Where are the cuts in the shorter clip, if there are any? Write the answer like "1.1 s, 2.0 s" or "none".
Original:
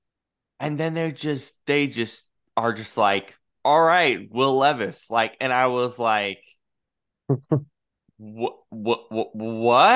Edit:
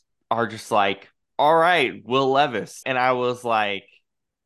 2.8 s